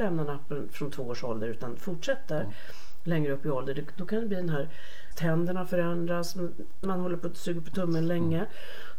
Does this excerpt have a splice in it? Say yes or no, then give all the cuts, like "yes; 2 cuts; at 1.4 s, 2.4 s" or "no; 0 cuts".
yes; 2 cuts; at 5.1 s, 6.8 s